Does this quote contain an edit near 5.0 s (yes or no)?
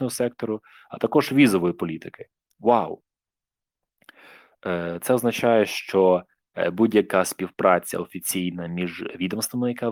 no